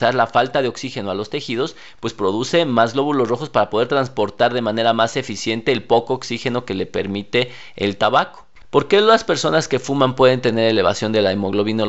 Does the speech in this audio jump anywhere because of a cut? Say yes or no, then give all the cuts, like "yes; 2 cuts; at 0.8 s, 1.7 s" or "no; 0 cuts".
yes; 1 cut; at 8.6 s